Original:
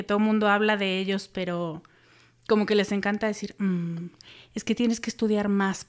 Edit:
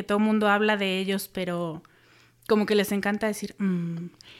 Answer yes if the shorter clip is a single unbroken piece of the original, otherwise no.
yes